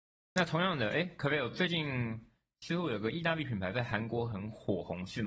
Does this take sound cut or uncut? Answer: uncut